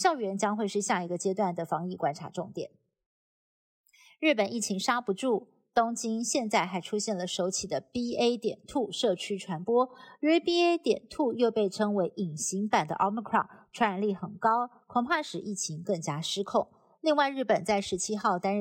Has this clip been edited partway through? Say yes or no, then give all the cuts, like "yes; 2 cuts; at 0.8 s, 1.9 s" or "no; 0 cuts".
no; 0 cuts